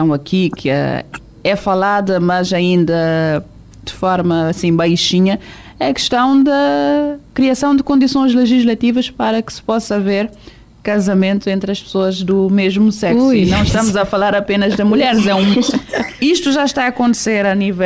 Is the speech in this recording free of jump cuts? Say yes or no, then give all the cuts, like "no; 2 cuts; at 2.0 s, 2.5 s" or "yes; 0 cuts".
yes; 0 cuts